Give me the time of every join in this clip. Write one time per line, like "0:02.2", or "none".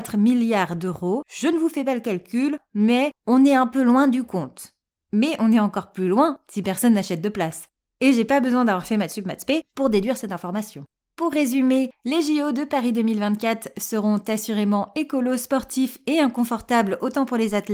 none